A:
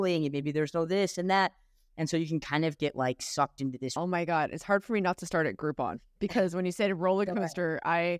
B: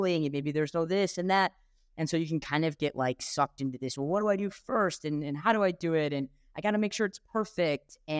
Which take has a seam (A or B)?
A